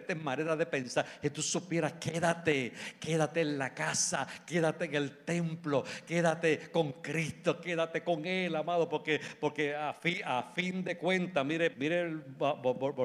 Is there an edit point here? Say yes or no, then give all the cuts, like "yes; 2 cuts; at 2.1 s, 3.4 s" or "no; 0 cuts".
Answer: yes; 1 cut; at 11.7 s